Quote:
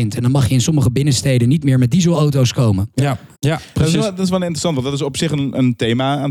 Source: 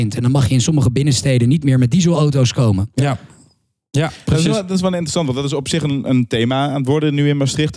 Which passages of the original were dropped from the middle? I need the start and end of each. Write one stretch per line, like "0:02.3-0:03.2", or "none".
0:03.3-0:03.9